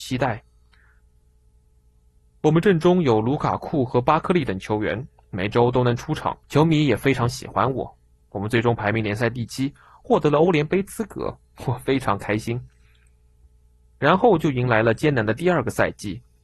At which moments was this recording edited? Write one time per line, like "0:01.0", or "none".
0:05.2
0:06.4